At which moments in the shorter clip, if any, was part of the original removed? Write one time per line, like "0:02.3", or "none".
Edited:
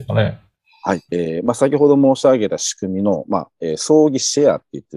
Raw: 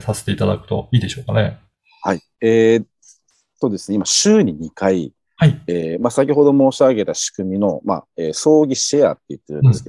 0:01.1